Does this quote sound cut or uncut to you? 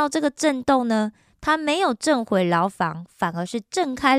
uncut